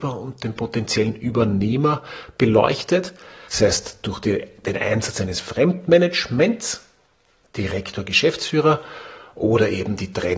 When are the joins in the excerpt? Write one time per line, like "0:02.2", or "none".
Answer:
0:03.5